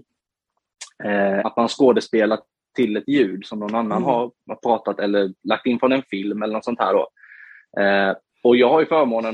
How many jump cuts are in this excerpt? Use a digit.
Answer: 1